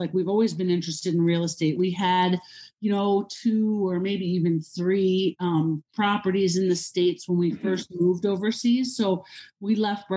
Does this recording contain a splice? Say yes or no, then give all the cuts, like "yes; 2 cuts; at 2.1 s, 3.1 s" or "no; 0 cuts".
no; 0 cuts